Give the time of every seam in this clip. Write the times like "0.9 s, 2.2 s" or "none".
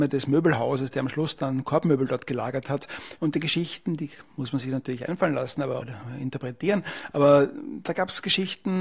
3.2 s, 5.8 s